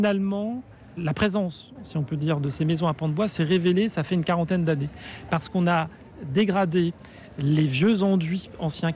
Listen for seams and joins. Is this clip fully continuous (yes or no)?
yes